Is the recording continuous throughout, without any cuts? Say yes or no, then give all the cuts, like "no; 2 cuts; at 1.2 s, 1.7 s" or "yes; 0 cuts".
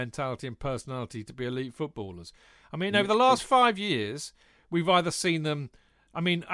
yes; 0 cuts